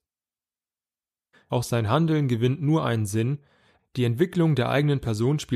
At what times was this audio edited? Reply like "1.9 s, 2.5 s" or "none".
1.3 s, 3.8 s

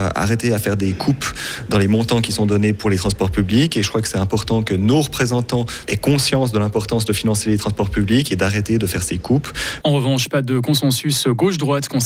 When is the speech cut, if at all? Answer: 5.9 s, 9.8 s

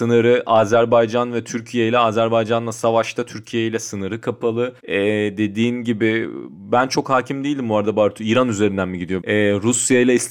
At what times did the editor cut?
4.8 s, 9.2 s

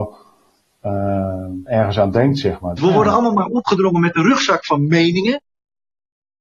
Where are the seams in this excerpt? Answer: 1.7 s, 2.8 s

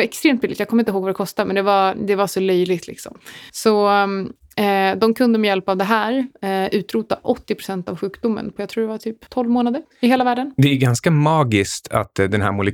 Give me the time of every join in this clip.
none

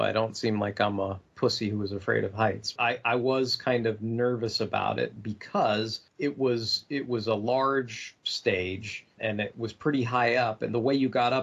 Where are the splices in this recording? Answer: 2.8 s, 9.2 s

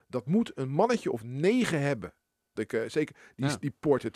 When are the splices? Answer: 2.6 s

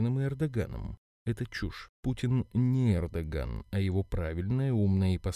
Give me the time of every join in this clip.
none

